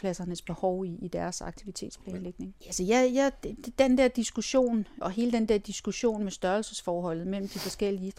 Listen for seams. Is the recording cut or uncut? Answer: cut